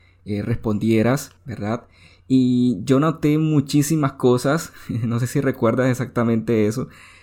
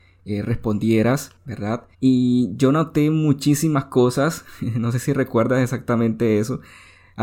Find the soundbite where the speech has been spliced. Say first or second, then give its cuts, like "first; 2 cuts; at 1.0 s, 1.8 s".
second; 1 cut; at 1.9 s